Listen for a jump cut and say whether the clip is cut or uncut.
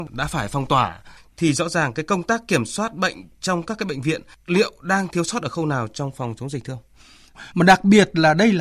cut